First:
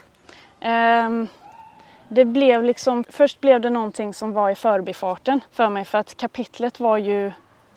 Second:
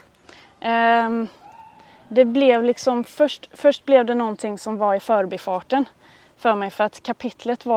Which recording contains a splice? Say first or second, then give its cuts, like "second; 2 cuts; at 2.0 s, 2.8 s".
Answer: first; 2 cuts; at 3.0 s, 5.5 s